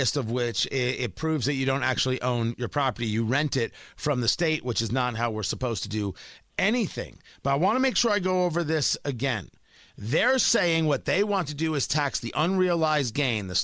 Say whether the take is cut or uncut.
uncut